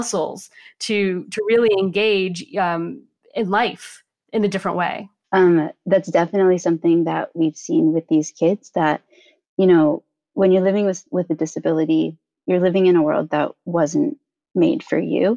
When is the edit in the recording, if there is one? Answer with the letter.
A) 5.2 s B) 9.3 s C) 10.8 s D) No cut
A